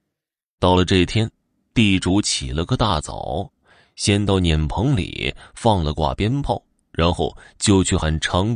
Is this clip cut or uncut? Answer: uncut